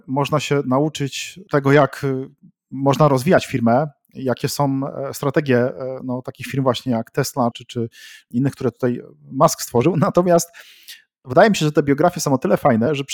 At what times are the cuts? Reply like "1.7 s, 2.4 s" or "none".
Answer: 7.5 s